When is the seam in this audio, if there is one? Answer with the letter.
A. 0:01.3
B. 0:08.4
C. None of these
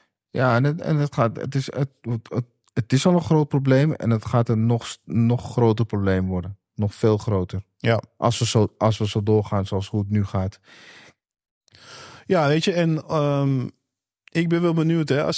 C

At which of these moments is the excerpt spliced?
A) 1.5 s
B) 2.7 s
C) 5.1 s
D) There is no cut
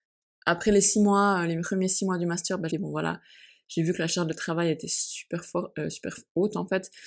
B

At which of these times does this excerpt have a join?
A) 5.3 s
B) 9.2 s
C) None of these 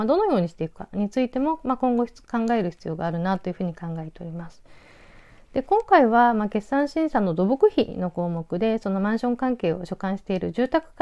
C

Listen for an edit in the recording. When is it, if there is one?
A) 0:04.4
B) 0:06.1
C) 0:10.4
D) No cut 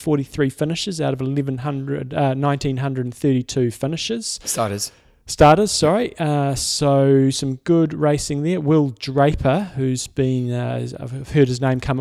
D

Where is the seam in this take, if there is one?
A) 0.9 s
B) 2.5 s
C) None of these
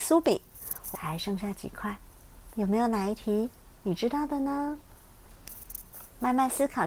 A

